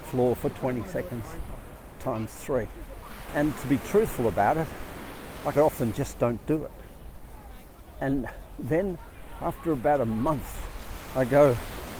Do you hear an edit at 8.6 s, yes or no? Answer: no